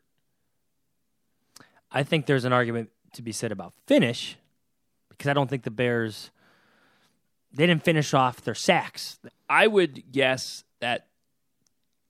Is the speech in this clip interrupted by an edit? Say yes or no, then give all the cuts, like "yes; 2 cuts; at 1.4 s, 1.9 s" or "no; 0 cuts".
yes; 2 cuts; at 9.3 s, 10.7 s